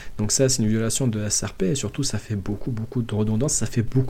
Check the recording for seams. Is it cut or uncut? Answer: uncut